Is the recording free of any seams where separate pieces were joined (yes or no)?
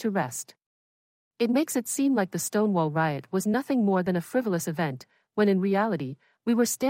yes